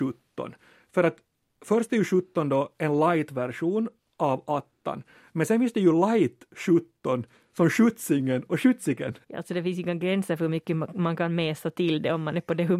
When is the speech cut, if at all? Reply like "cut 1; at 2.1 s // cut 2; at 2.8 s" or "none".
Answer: cut 1; at 9.2 s